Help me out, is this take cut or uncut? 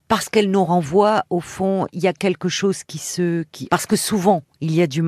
cut